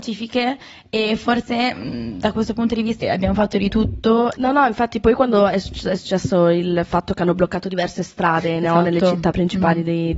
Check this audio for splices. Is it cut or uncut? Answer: cut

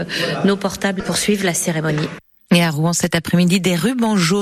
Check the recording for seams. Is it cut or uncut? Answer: uncut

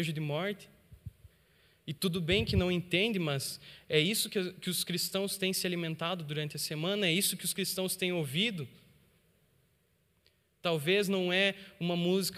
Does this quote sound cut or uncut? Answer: uncut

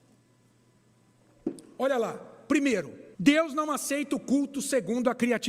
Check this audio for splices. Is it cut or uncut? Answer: cut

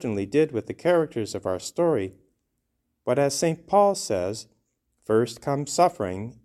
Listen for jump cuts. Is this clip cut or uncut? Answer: uncut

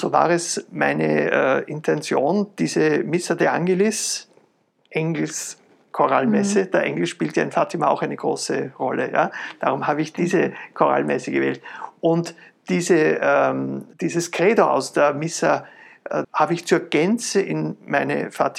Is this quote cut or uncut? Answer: cut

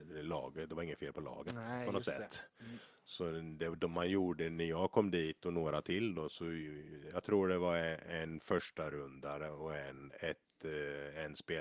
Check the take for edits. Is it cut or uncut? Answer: uncut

